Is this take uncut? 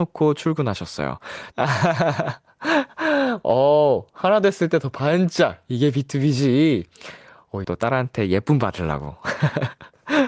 no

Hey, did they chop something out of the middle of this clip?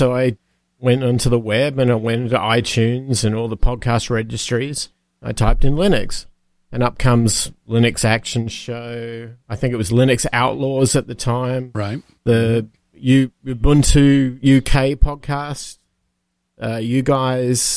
no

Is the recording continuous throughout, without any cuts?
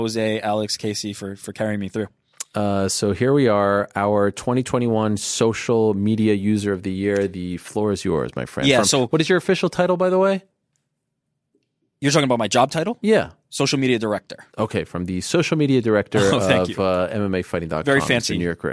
yes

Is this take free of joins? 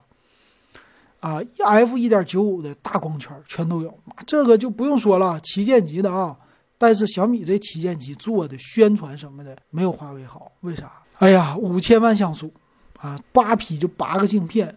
no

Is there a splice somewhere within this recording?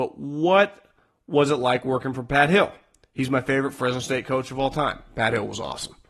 no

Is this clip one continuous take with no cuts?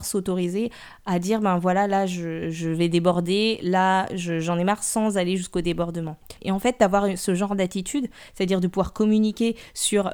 no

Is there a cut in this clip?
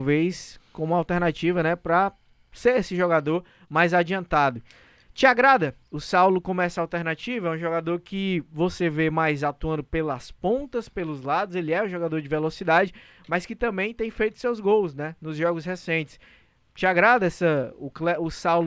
no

